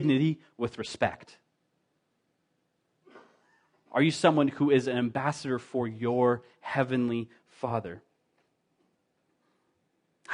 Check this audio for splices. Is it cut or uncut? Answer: uncut